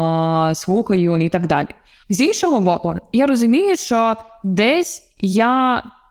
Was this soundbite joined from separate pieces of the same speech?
yes; 1 cut; at 2.0 s

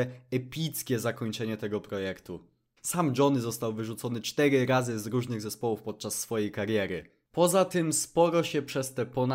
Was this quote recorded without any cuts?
no; 1 cut; at 2.8 s

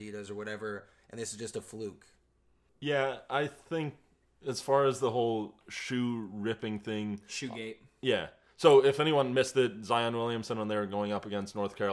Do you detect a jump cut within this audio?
no; 0 cuts

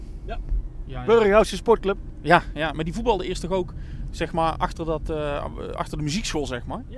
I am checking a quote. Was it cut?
no; 0 cuts

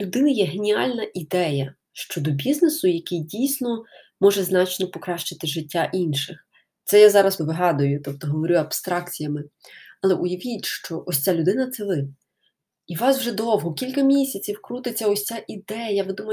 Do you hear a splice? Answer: yes; 1 cut; at 7.4 s

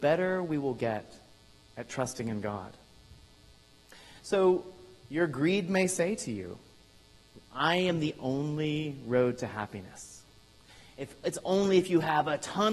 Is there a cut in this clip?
no; 0 cuts

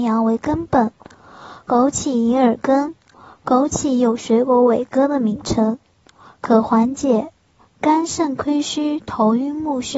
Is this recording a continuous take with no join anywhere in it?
yes; 0 cuts

